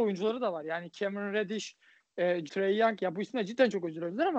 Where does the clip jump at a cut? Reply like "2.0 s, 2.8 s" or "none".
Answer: 2.5 s